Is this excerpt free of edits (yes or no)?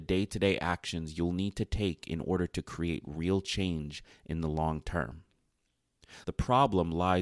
no